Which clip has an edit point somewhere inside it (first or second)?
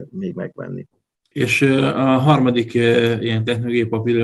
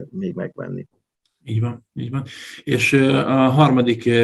first